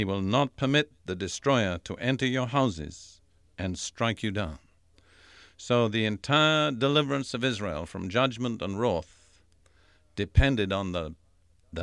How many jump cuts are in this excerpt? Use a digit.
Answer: 0